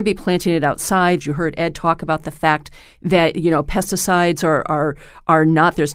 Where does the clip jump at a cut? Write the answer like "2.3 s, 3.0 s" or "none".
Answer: 1.2 s